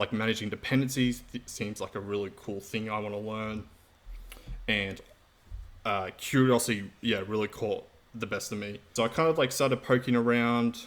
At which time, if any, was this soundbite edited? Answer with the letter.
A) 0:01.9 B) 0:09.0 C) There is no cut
B